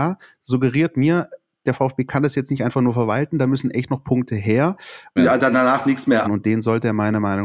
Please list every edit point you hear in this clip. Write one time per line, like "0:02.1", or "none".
0:05.2
0:06.2

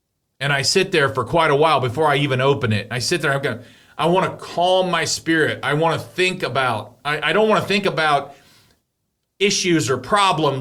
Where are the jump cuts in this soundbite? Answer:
none

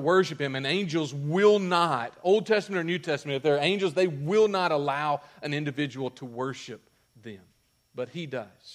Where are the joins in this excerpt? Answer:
none

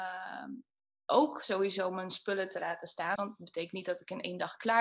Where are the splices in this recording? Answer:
0:03.2

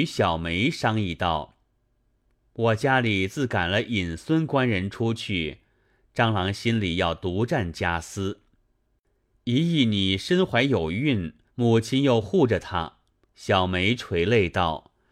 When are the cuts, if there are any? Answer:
0:11.5
0:13.2

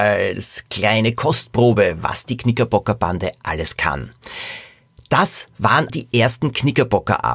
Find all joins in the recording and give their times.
0:05.9

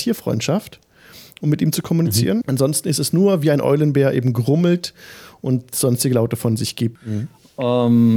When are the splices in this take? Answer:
0:02.4
0:06.9

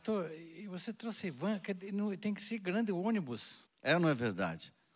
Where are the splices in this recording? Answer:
0:03.6

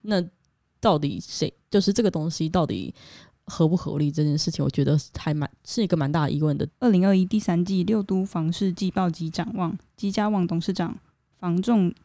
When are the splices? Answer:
0:06.7

